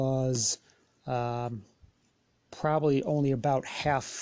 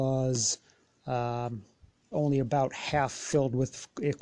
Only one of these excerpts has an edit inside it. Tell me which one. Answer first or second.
second